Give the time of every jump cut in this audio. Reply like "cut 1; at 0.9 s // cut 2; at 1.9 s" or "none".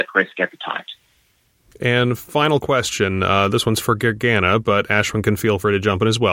none